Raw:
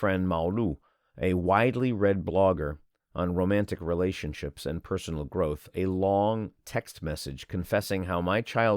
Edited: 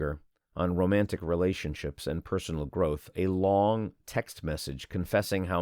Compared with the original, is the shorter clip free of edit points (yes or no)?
yes